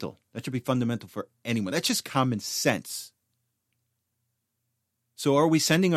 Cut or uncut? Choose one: uncut